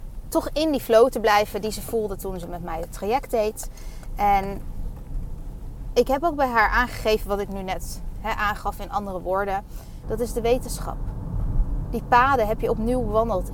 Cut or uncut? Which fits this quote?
cut